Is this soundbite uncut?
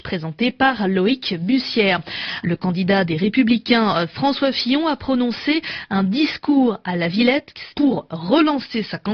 no; 2 cuts; at 2.4 s, 7.7 s

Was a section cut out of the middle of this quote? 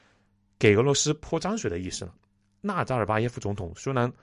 no; 0 cuts

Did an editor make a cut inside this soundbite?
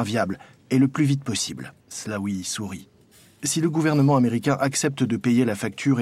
yes; 1 cut; at 1.8 s

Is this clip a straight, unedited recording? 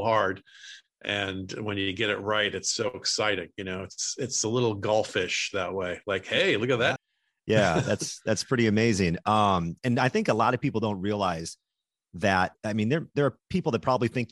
no; 1 cut; at 7.0 s

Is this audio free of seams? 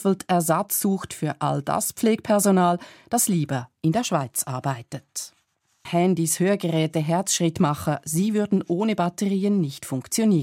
no; 1 cut; at 5.8 s

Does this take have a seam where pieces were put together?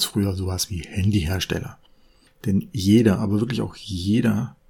no; 0 cuts

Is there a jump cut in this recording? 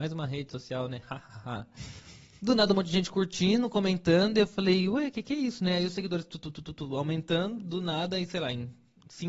no; 0 cuts

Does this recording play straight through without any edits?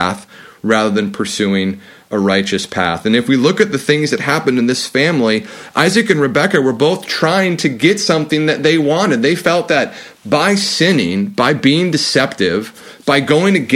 yes; 0 cuts

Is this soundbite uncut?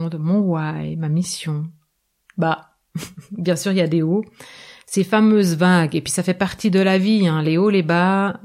no; 1 cut; at 2.2 s

